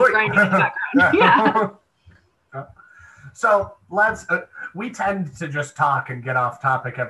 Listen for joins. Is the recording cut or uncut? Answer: uncut